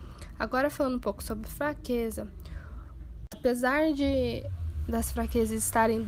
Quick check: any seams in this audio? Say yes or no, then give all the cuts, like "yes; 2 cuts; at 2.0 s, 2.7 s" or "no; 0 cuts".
yes; 1 cut; at 3.3 s